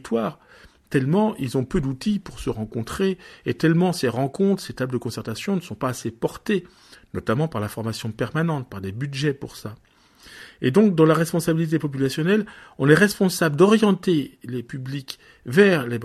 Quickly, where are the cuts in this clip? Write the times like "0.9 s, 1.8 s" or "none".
none